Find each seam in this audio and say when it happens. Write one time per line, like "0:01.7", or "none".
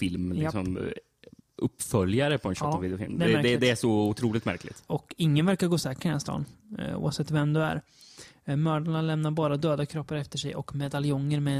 0:04.9